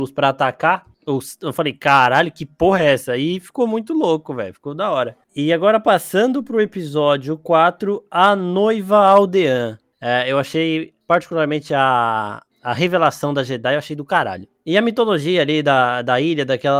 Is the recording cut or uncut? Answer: uncut